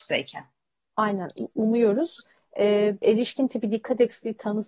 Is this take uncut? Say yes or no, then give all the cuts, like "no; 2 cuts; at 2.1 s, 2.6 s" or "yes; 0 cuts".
no; 1 cut; at 3.0 s